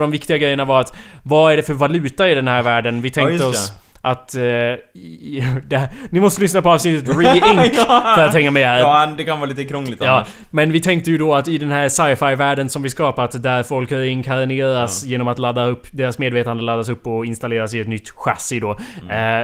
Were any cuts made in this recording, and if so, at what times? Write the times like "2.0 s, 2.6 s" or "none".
none

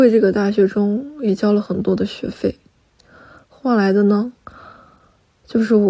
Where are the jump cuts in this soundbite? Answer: none

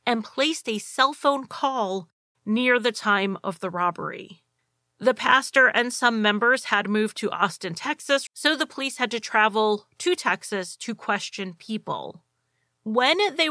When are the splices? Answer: 8.3 s

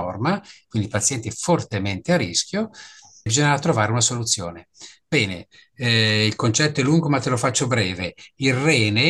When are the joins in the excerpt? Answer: 3.3 s

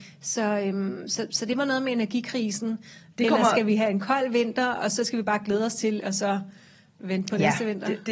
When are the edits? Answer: 3.1 s, 6.0 s

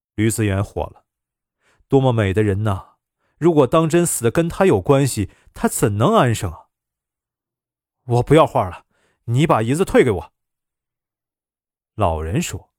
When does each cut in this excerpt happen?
none

